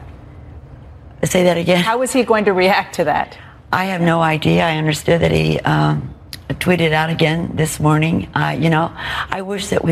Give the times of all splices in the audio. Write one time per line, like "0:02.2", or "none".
0:03.7